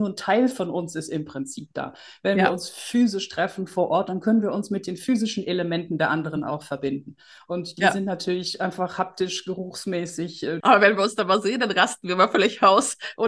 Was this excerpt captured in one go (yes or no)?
no